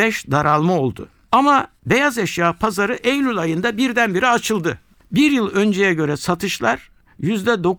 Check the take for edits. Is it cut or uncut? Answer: uncut